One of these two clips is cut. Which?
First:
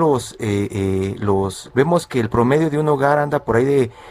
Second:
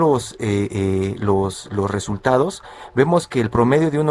first; 1 cut; at 1.7 s

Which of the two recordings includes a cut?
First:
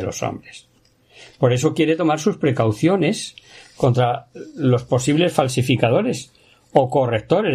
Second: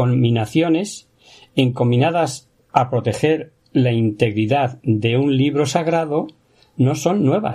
second; 1 cut; at 2.5 s

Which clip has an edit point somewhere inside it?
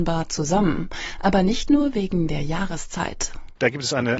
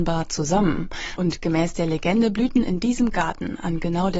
second; 1 cut; at 1.2 s

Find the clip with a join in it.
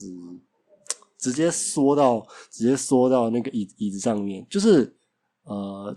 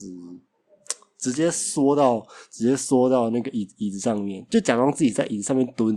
second; 1 cut; at 4.5 s

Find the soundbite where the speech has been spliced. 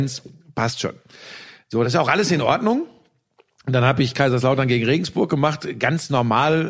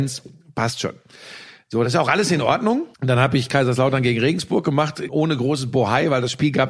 second; 2 cuts; at 2.9 s, 5.1 s

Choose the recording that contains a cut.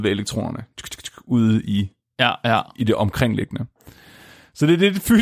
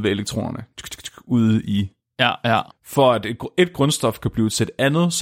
second; 1 cut; at 2.7 s

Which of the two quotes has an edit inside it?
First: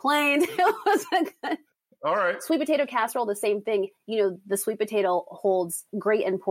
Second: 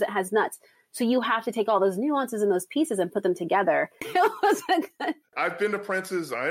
second; 2 cuts; at 4.0 s, 5.3 s

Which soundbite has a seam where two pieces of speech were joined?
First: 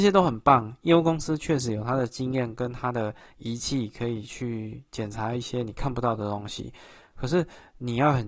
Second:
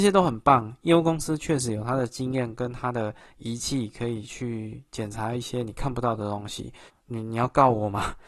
second; 1 cut; at 6.9 s

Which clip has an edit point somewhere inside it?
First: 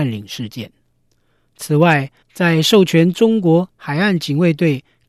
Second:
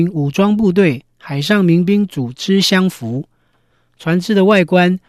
first; 1 cut; at 2.2 s

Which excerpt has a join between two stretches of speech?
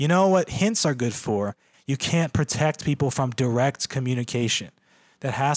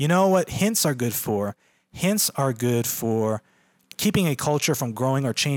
first; 1 cut; at 1.7 s

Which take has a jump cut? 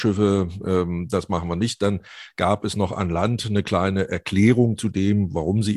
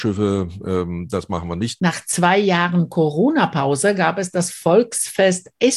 second; 1 cut; at 1.8 s

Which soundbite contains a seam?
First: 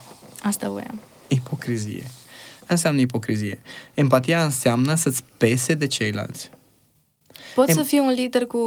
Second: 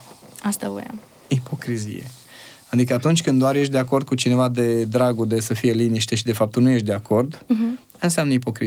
first; 1 cut; at 2.6 s

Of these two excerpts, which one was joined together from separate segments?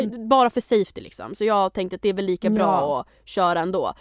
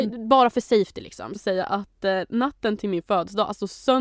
second; 1 cut; at 1.4 s

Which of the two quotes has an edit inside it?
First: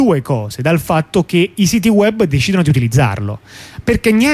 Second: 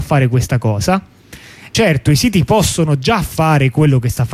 second; 1 cut; at 1.7 s

